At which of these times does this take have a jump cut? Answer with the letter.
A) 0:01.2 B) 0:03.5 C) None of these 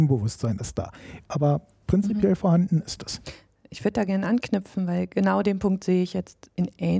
A